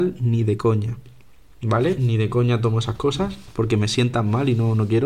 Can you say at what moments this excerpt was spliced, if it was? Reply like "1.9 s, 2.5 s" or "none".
none